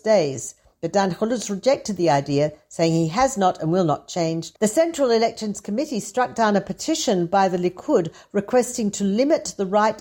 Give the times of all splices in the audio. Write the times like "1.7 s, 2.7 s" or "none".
4.6 s